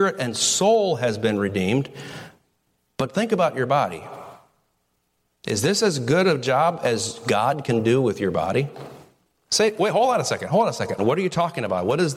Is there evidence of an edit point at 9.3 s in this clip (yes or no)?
yes